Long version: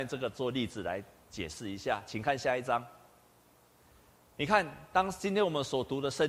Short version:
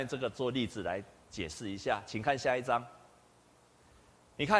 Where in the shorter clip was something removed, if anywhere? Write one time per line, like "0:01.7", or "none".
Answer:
none